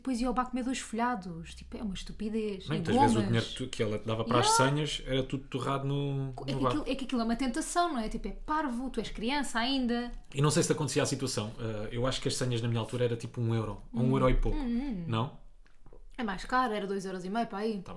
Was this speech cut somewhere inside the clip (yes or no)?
no